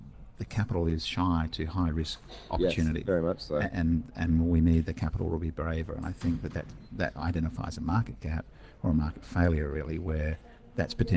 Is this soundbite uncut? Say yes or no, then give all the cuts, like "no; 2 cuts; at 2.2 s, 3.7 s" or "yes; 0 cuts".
yes; 0 cuts